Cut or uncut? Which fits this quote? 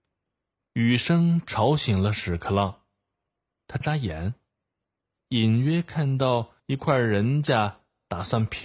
cut